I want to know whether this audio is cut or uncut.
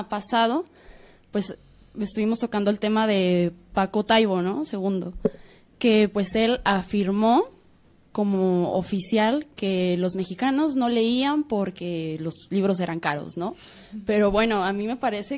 uncut